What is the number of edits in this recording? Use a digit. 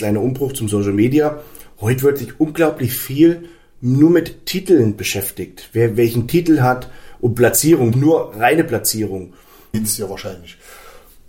2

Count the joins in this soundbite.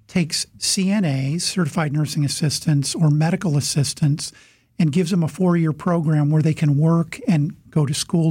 0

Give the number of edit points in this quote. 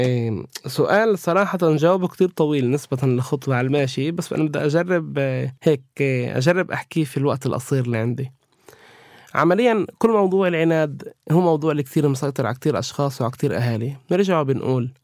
1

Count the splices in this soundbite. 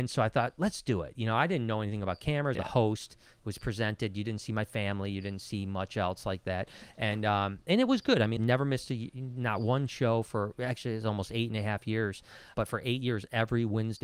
3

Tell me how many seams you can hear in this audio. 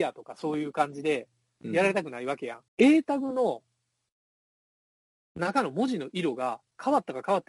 1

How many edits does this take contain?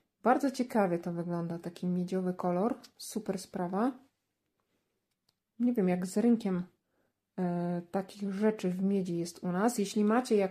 1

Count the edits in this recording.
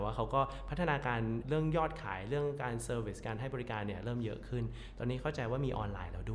1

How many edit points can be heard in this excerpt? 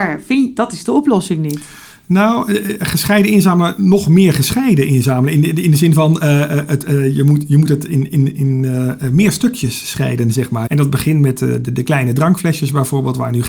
1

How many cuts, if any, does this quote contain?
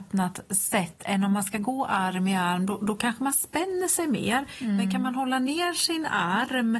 0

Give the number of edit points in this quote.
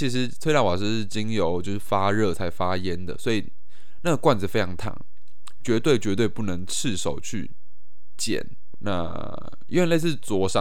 1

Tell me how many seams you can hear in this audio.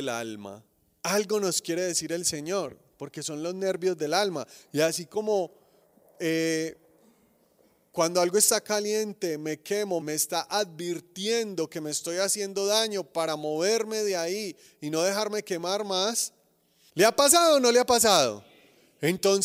3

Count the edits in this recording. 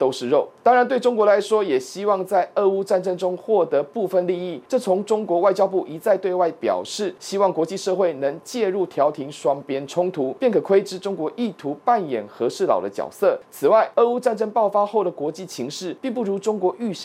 0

